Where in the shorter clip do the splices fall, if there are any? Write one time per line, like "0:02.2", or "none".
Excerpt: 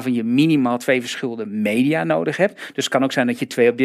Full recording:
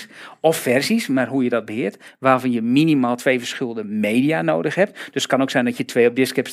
none

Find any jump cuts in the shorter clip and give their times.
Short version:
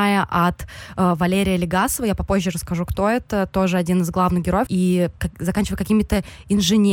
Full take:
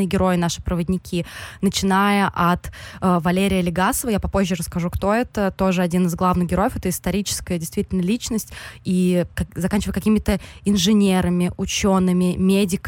0:04.7

